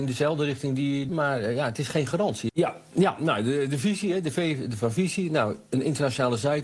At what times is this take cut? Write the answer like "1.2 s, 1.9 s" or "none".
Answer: 1.1 s, 2.5 s